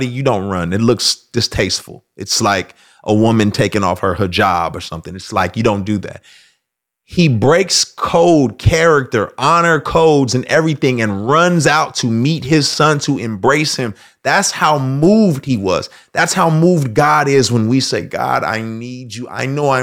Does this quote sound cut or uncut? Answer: uncut